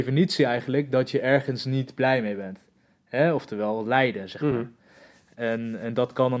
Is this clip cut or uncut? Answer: uncut